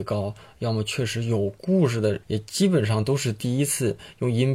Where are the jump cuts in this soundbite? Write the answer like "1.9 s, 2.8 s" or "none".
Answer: 2.2 s